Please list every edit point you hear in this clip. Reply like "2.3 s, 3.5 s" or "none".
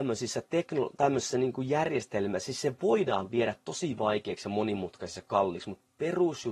none